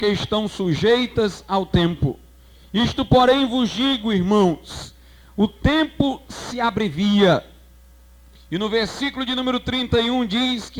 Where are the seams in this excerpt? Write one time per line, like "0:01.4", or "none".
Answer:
none